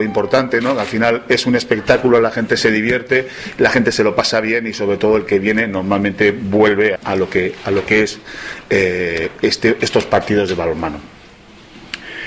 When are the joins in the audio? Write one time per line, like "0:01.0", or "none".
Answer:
0:07.0